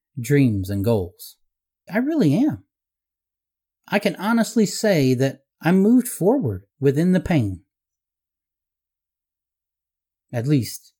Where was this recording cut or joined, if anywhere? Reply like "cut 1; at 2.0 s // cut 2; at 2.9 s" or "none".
cut 1; at 1.9 s // cut 2; at 6.7 s